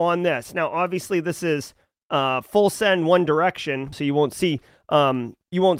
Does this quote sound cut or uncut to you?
cut